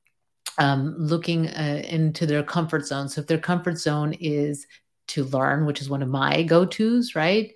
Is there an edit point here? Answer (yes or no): no